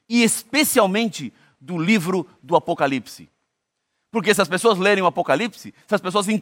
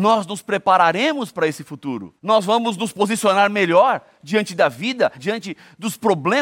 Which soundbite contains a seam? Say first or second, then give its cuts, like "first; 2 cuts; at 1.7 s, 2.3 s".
second; 2 cuts; at 2.2 s, 5.2 s